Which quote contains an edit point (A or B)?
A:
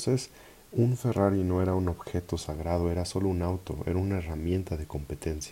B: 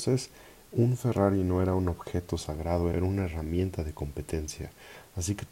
B